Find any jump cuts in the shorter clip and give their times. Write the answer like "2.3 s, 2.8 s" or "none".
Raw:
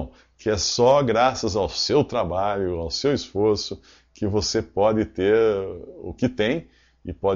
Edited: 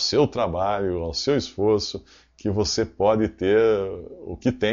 none